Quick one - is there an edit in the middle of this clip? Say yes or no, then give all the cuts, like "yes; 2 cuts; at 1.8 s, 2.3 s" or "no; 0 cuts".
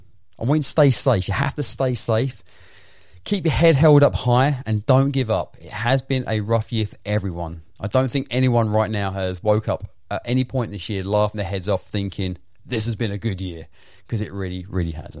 no; 0 cuts